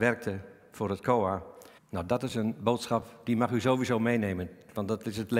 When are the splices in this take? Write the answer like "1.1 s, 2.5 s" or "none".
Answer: 1.8 s